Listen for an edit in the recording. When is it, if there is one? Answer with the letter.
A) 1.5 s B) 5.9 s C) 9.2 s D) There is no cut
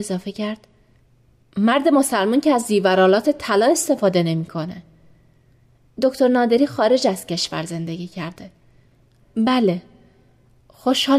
C